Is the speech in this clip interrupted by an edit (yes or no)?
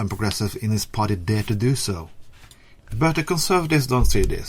yes